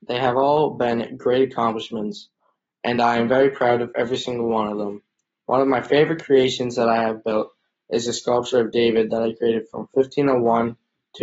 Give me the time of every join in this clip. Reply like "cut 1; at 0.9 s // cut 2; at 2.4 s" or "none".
none